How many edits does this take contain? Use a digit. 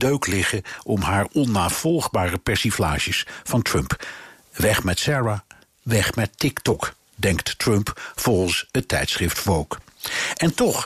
0